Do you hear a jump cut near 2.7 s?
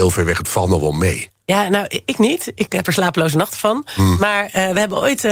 yes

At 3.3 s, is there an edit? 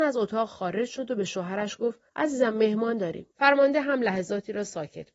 yes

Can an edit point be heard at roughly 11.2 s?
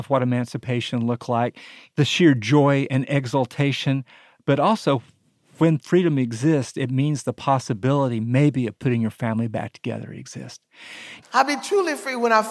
yes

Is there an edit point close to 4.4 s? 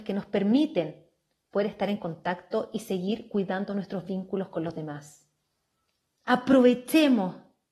no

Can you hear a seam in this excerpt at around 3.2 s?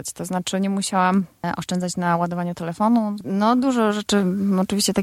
yes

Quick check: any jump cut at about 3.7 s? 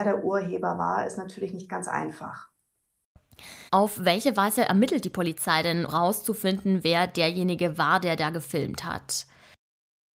yes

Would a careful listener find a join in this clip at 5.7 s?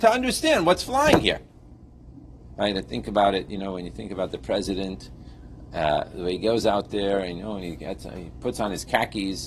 no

